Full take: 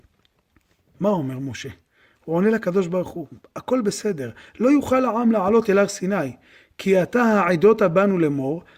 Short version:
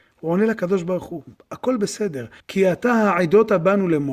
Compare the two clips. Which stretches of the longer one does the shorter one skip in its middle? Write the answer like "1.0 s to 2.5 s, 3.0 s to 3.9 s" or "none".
4.4 s to 6.7 s